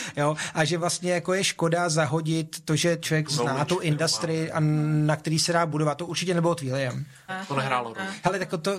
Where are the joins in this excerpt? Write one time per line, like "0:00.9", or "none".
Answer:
0:07.3